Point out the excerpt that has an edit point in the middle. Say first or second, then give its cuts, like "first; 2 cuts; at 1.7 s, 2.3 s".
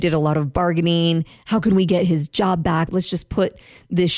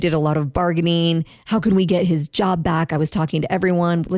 first; 1 cut; at 2.9 s